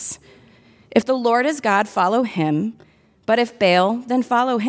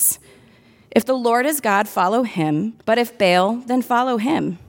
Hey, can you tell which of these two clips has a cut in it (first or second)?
second